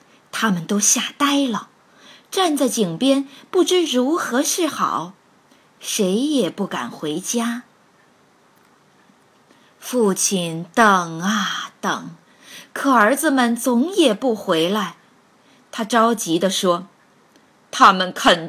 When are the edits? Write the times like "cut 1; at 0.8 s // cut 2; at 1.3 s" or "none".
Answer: none